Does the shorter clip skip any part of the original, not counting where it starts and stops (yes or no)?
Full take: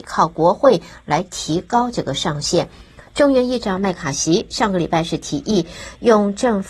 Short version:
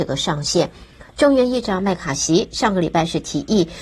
no